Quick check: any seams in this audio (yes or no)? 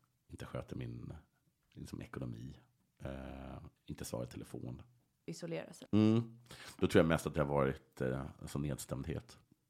yes